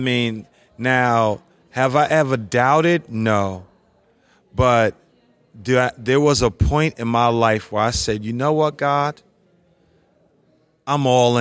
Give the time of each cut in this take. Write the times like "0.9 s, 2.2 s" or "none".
none